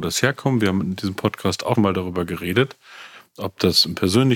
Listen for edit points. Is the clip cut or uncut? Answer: cut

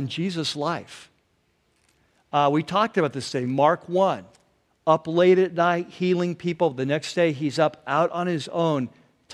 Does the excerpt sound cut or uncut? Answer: uncut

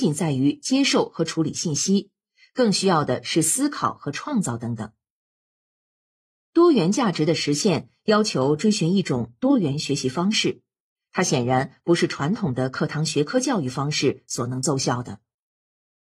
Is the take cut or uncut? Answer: uncut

